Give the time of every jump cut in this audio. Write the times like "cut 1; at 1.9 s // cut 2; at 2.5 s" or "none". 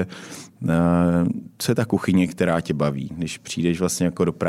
none